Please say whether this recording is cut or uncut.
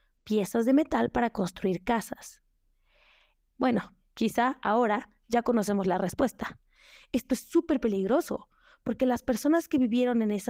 cut